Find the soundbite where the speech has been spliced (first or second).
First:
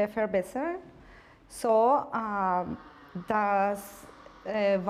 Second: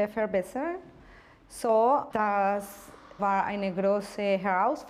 second